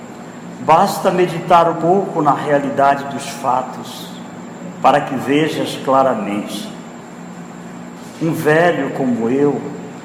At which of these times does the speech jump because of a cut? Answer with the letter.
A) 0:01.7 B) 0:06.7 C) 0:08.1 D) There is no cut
A